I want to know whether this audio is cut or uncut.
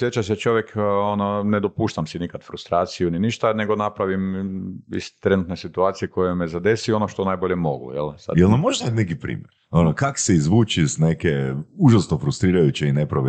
uncut